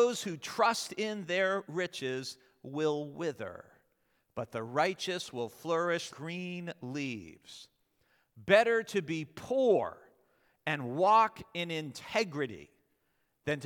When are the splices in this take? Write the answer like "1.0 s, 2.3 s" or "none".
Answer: 6.1 s